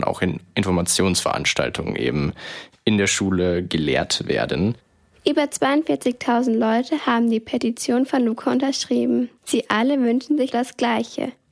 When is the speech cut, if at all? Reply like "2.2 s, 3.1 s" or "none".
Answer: 10.5 s